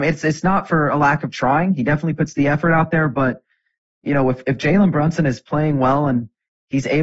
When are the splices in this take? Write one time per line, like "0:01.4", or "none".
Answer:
none

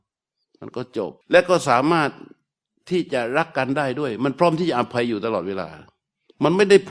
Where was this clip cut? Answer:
0:01.2

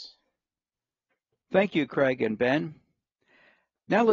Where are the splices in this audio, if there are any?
none

